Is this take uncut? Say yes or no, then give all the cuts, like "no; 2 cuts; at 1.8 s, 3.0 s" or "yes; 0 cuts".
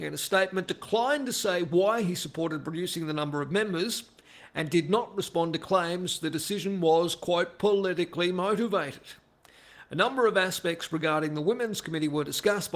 yes; 0 cuts